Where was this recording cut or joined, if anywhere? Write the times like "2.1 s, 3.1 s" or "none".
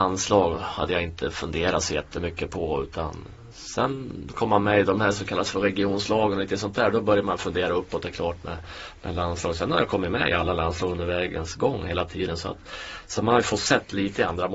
none